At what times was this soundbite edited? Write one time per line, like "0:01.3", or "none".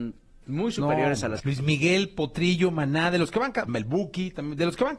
0:01.4
0:03.7